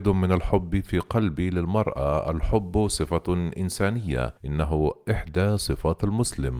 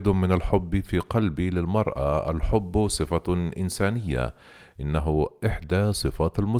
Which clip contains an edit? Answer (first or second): first